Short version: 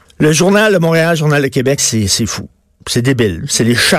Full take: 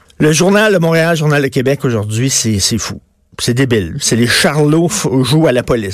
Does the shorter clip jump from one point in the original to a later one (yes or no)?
yes